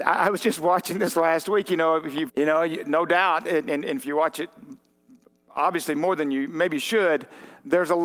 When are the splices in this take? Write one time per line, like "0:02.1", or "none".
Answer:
0:02.3